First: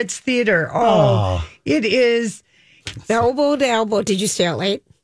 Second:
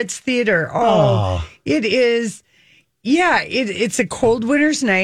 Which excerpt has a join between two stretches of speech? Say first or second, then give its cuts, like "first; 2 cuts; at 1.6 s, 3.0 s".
first; 1 cut; at 2.8 s